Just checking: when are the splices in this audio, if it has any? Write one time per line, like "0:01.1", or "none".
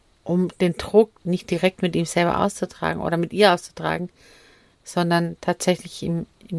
0:01.2

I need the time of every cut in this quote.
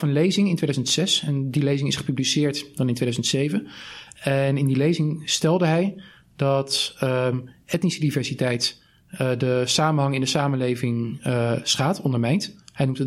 none

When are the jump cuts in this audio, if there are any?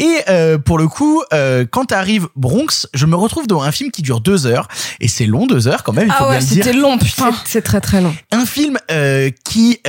none

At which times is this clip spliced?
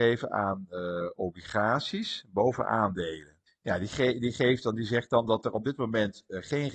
0:03.5

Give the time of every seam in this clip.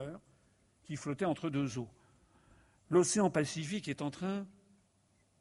none

